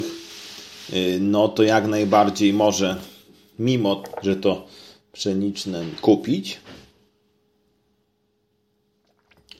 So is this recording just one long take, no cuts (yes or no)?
yes